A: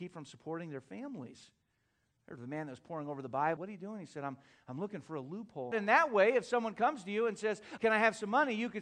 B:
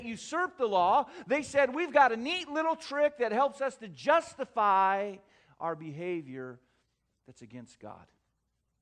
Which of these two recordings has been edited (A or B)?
A